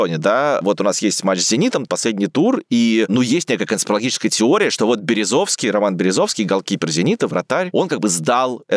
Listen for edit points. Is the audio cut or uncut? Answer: cut